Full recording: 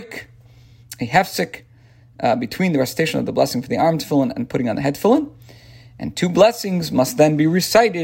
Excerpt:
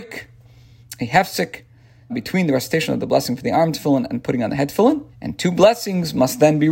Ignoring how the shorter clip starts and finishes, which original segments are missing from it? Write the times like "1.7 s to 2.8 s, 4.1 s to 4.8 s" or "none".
2.1 s to 2.4 s, 5.4 s to 5.9 s